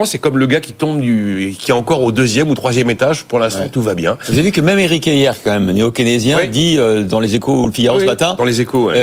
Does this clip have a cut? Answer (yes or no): no